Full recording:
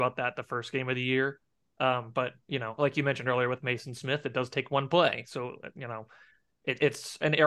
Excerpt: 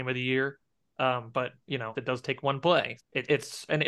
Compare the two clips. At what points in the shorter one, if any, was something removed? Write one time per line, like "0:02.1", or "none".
0:01.9
0:03.0